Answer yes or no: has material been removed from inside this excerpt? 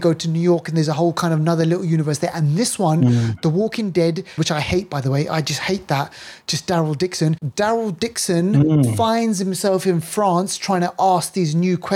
yes